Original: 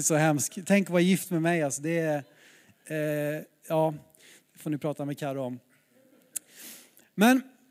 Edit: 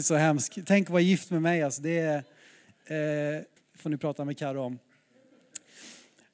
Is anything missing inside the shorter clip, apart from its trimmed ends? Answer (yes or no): yes